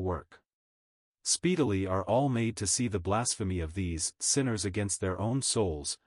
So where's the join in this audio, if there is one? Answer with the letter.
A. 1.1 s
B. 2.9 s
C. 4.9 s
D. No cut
A